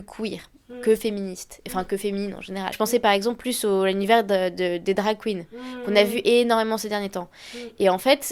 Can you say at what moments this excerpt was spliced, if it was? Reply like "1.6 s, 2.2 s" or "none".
2.7 s